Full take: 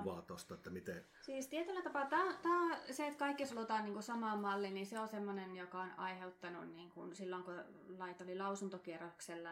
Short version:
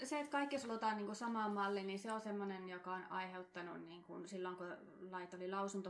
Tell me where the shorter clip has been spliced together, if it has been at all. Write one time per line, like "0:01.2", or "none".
none